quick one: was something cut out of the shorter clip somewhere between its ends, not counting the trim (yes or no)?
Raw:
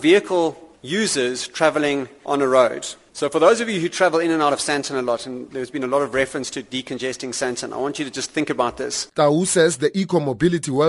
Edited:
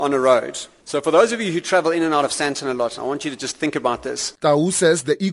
yes